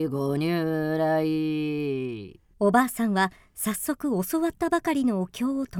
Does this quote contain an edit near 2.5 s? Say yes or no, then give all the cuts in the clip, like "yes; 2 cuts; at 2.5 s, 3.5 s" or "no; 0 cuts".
yes; 1 cut; at 2.5 s